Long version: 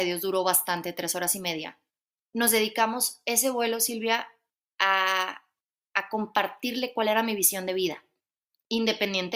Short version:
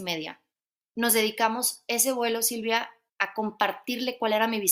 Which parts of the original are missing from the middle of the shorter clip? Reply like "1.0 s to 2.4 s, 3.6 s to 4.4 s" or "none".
4.4 s to 5.8 s

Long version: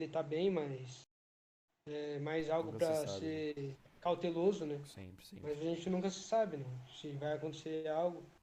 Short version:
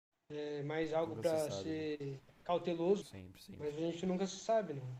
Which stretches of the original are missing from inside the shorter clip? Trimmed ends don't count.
4.6 s to 4.8 s

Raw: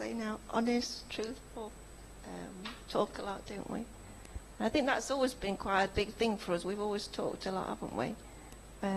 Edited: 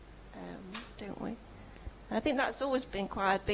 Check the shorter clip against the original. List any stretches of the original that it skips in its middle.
2.9 s to 3.4 s

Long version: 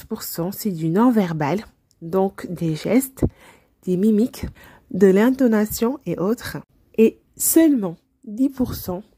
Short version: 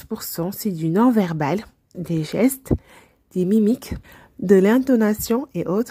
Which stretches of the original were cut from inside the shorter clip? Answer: 1.9 s to 2.5 s

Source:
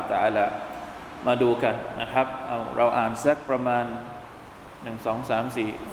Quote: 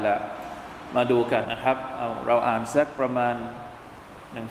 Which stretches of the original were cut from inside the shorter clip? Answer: 1.7 s to 1.9 s

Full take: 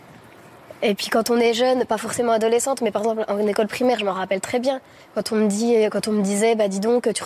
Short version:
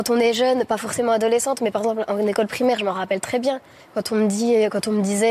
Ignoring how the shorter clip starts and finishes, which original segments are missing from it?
none

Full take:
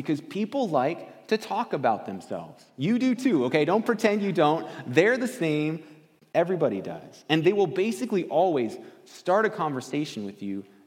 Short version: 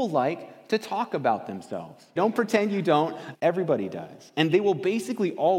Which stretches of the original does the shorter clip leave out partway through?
2.7 s to 3.7 s, 4.8 s to 6.3 s

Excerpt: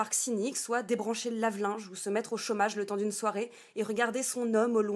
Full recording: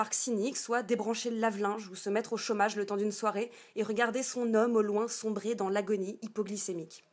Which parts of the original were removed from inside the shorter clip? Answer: none

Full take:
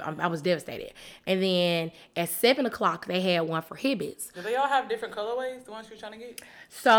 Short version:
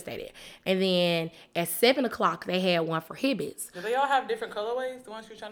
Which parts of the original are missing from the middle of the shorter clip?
none

